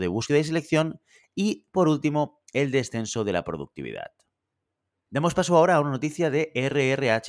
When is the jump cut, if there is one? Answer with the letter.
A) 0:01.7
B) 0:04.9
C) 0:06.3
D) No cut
D